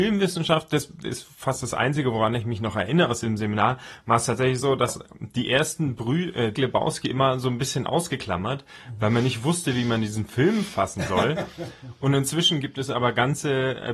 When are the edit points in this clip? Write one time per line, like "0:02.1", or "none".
0:06.5

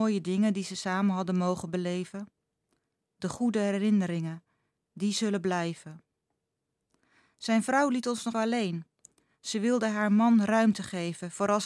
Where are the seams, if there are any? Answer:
0:08.3

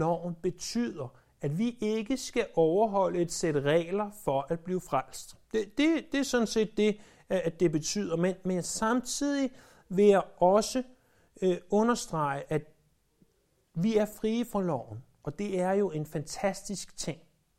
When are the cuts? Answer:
0:05.4

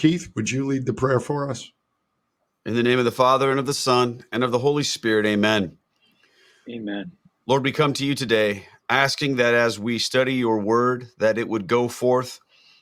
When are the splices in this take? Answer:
none

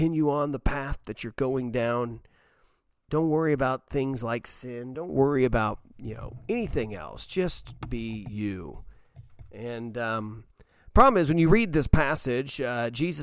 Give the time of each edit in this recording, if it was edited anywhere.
none

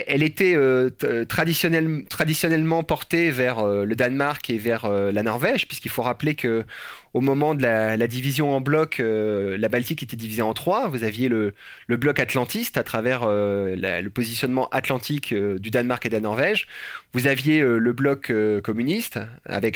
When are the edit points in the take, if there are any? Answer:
none

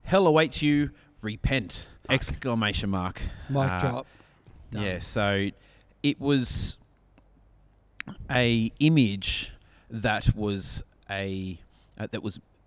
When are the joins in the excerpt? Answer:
0:02.1

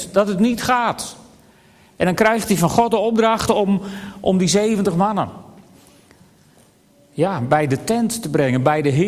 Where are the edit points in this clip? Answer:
none

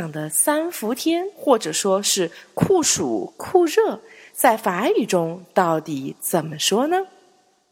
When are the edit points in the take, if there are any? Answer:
none

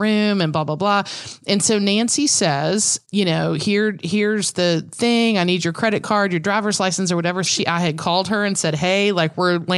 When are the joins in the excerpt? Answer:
0:03.0
0:07.5

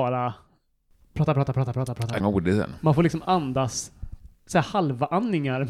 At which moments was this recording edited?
0:02.2
0:04.3

